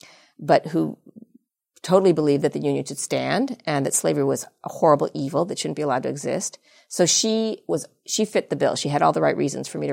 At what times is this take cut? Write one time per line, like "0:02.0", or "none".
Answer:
none

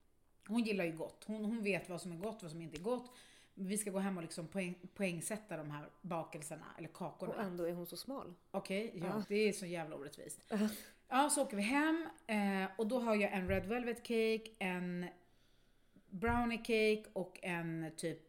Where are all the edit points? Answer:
0:09.2

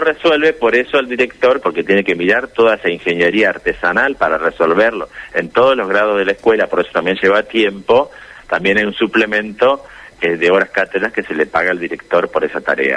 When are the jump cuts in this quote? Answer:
0:01.6

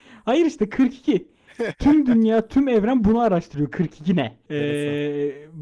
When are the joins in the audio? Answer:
0:04.5

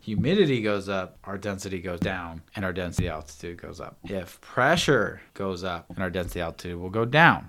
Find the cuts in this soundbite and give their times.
0:05.9

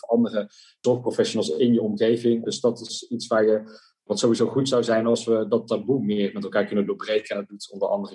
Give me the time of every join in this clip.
0:02.4

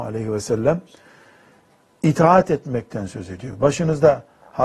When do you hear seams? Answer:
none

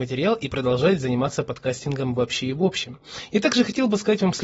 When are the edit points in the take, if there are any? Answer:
none

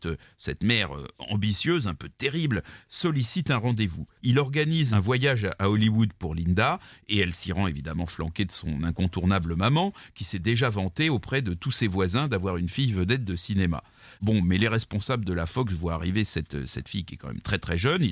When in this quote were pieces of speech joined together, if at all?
0:04.2

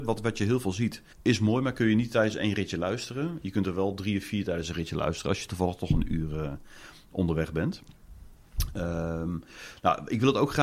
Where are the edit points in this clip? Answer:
0:01.1

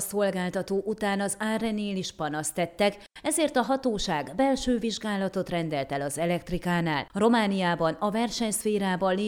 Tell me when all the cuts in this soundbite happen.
0:07.1

